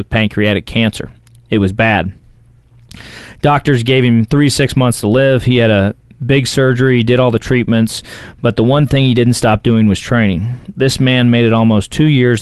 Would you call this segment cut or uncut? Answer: uncut